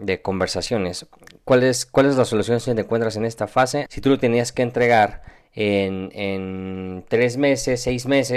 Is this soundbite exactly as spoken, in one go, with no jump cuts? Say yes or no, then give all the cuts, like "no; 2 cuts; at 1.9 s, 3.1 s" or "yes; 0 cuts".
no; 1 cut; at 3.9 s